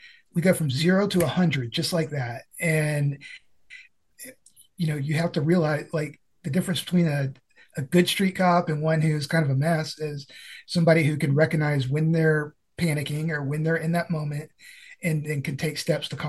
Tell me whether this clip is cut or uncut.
uncut